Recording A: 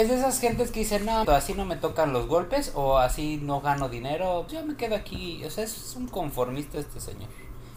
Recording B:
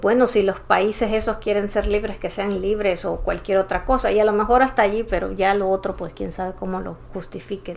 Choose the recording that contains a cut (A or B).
A